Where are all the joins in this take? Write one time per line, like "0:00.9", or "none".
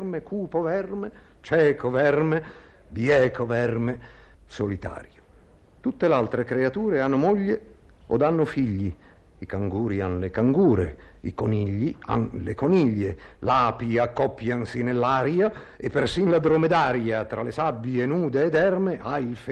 0:04.3